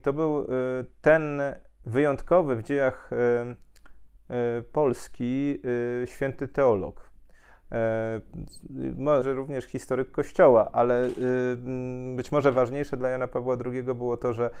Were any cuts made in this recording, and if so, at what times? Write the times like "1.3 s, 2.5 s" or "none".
9.2 s

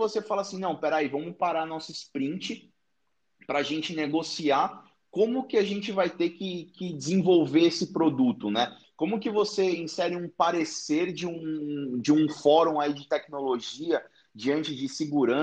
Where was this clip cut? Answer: 8.8 s

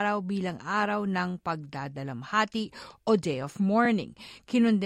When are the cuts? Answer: none

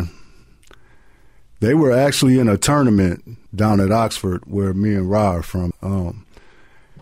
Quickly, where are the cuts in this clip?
3.5 s, 5.7 s

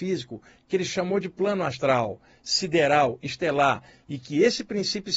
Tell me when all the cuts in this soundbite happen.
none

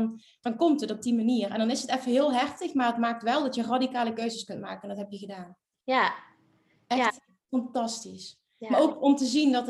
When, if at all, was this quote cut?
none

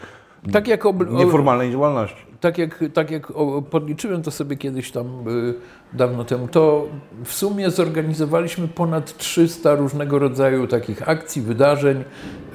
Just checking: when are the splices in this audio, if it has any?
3.7 s, 6.5 s

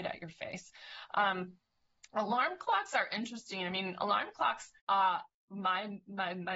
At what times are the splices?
4.8 s

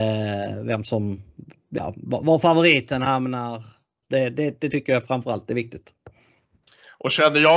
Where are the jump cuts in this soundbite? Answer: 4.0 s

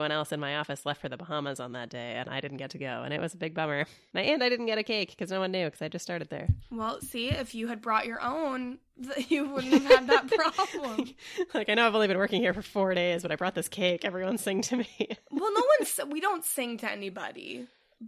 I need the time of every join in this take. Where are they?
none

